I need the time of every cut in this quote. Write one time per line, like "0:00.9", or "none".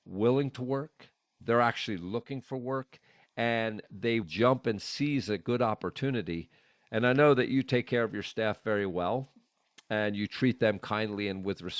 0:04.2